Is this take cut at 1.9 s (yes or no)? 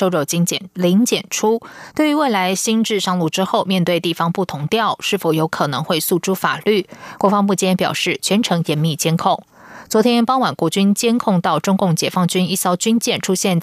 no